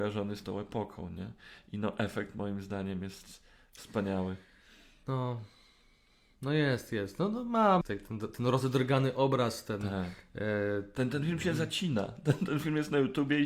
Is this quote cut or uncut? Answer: cut